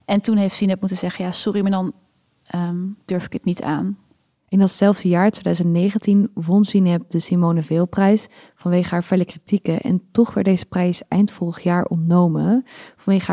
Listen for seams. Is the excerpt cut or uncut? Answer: uncut